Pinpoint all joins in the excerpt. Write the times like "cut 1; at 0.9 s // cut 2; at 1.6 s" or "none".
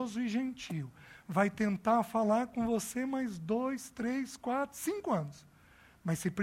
none